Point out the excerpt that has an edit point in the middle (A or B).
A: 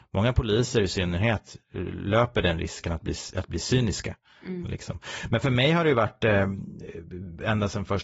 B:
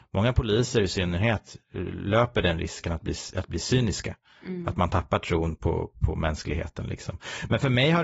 A